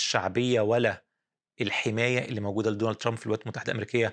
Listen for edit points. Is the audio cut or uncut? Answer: uncut